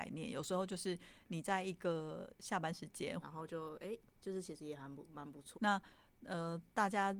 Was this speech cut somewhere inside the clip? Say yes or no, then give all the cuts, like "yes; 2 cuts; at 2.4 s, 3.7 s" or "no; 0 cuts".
yes; 2 cuts; at 3.2 s, 5.5 s